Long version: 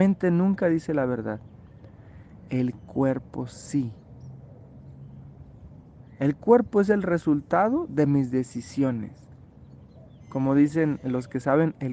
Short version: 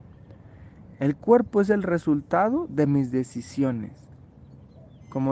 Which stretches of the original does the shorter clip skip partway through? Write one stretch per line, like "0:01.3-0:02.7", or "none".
0:02.5-0:06.1